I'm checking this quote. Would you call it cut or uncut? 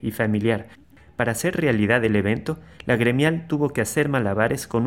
uncut